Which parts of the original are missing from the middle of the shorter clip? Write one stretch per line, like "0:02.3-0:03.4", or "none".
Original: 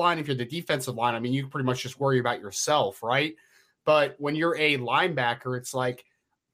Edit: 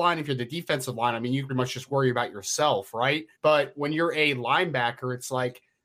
0:01.5-0:01.6
0:03.4-0:03.8

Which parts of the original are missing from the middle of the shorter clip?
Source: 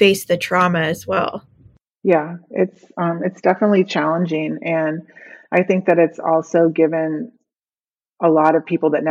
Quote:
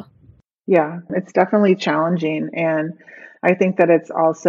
0:02.5-0:03.2

